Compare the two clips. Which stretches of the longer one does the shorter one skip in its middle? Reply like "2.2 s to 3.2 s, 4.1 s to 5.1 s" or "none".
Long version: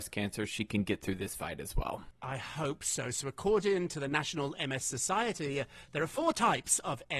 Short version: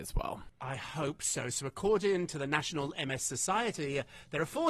none